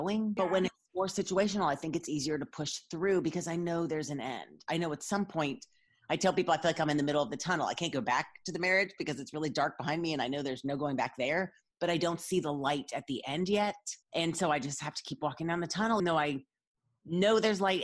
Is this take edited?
yes; 2 cuts; at 14.0 s, 16.0 s

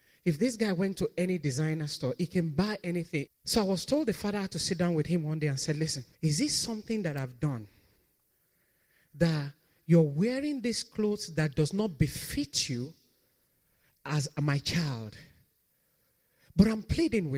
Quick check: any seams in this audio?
yes; 2 cuts; at 3.3 s, 6.1 s

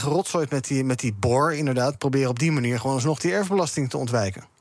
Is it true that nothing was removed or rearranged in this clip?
no; 1 cut; at 1.9 s

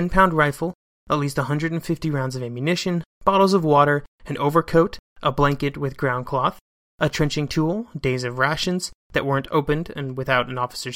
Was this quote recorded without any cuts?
yes; 0 cuts

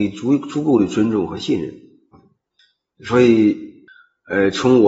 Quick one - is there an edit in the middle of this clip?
yes; 1 cut; at 2.1 s

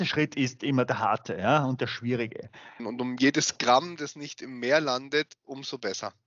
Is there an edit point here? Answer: yes; 1 cut; at 2.8 s

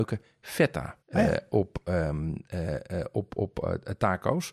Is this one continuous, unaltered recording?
no; 1 cut; at 1.0 s

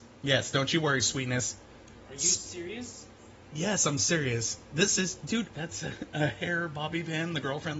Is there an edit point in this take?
yes; 1 cut; at 5.5 s

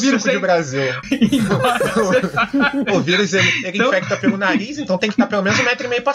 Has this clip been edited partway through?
yes; 1 cut; at 1.0 s

